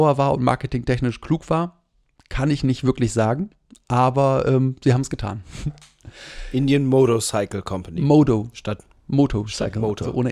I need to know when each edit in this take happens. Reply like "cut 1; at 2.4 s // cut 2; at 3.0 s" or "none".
none